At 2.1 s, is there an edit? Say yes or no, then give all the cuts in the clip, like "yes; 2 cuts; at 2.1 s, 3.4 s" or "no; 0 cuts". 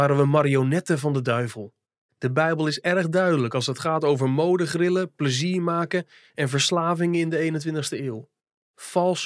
yes; 1 cut; at 2.1 s